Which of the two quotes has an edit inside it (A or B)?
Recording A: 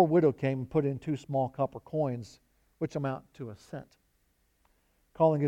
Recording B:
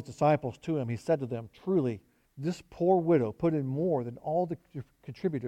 B